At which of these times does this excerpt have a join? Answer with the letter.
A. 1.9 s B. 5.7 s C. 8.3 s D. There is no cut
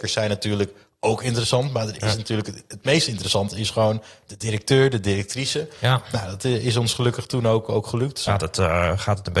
C